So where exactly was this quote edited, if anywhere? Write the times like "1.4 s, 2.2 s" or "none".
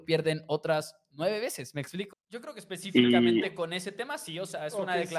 2.1 s